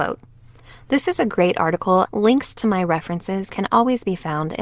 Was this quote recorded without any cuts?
no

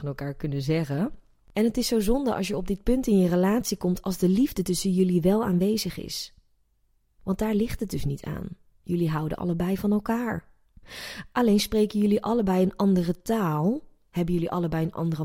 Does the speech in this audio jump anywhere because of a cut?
no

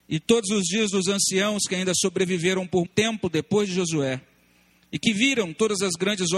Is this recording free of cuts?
no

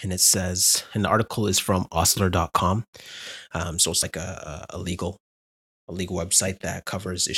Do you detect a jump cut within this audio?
no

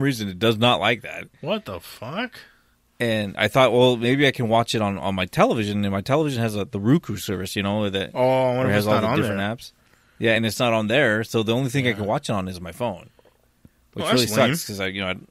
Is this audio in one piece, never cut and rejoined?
yes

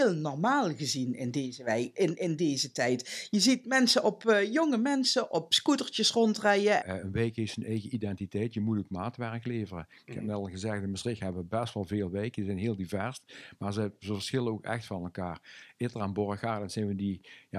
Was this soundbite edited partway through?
yes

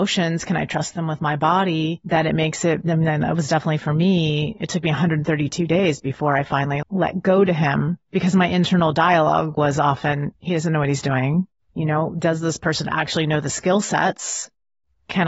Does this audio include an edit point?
yes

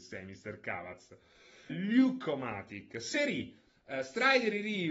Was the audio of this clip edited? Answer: yes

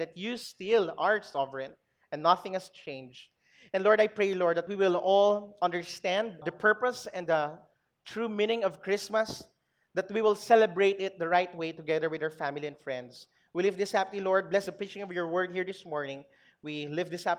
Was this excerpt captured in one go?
yes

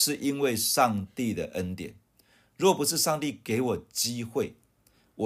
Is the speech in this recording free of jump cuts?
yes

